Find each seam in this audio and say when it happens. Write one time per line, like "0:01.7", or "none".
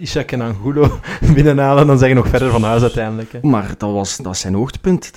0:03.4